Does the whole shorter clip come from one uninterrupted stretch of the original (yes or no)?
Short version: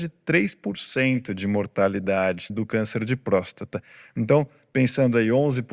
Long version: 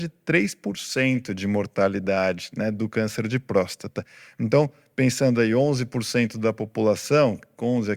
no